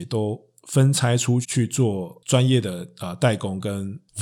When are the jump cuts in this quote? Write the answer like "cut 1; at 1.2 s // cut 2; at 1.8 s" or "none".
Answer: cut 1; at 1.4 s

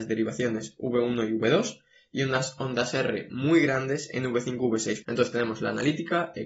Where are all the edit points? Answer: cut 1; at 5.0 s

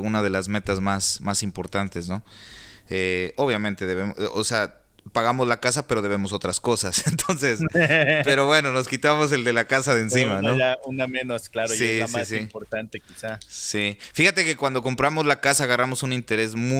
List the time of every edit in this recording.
none

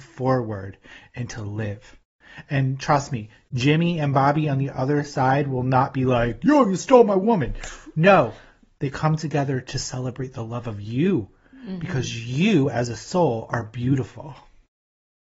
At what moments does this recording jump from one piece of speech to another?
none

